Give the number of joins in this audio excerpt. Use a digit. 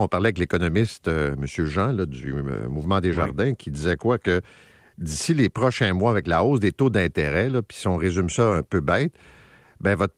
0